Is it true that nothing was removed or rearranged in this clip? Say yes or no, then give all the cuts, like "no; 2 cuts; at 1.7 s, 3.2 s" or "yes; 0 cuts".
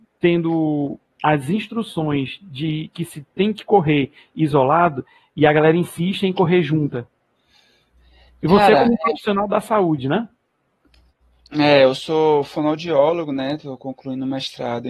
yes; 0 cuts